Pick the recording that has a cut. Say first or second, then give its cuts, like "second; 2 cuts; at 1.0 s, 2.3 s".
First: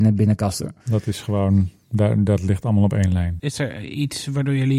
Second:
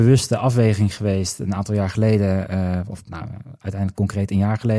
first; 1 cut; at 3.4 s